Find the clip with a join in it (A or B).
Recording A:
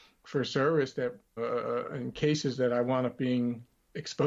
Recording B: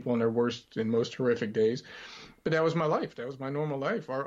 A